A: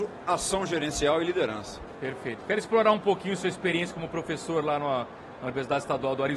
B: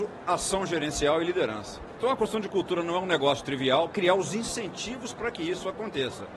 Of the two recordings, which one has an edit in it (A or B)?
B